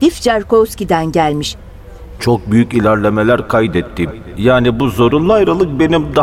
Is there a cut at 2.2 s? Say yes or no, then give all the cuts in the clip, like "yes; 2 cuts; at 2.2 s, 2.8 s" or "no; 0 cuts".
yes; 2 cuts; at 2.2 s, 4.3 s